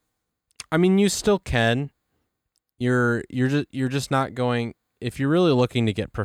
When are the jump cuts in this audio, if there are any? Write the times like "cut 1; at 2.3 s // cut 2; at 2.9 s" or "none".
none